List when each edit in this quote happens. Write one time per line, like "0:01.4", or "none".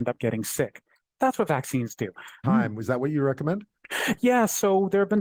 0:02.4